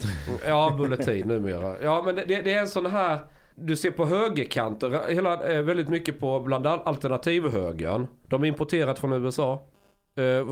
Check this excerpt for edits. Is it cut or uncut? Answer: cut